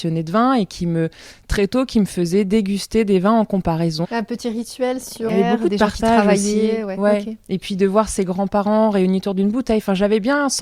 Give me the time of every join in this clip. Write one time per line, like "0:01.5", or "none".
0:04.0
0:05.3